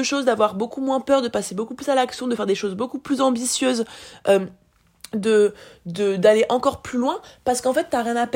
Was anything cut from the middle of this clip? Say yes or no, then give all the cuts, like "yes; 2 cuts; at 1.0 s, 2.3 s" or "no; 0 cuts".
no; 0 cuts